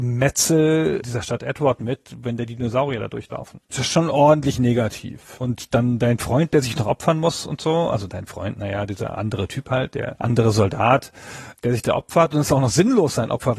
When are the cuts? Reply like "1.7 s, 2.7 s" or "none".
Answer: 3.6 s